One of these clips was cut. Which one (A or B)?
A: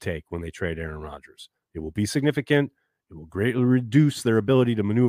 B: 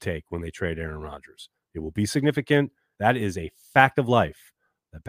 B